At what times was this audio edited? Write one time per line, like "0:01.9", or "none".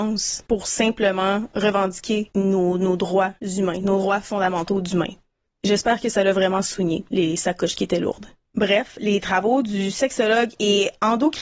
none